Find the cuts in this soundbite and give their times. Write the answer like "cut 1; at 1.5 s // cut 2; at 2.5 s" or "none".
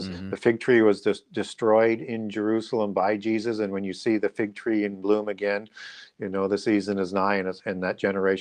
none